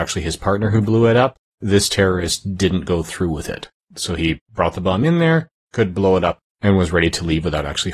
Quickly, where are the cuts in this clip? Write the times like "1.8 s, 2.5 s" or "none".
none